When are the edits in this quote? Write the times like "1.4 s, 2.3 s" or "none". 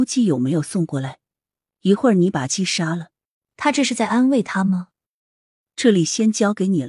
3.3 s, 5.7 s